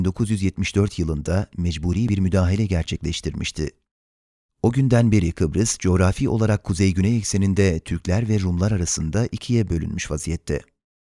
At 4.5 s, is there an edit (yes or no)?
no